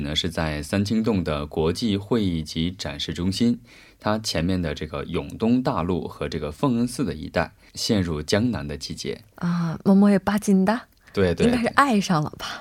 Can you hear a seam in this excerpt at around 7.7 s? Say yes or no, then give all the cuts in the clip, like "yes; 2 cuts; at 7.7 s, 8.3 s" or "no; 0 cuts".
yes; 1 cut; at 7.7 s